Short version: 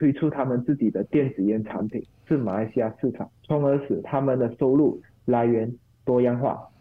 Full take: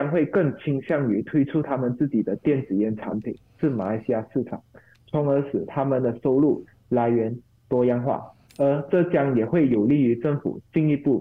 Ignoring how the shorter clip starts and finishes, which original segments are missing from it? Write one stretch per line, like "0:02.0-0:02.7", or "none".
0:04.7-0:05.0